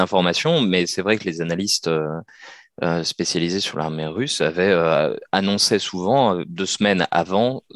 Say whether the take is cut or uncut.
uncut